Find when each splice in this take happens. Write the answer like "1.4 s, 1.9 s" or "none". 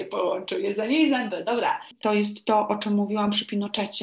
2.0 s